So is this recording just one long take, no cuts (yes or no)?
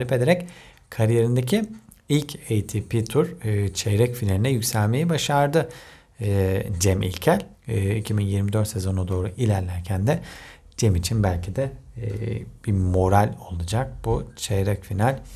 no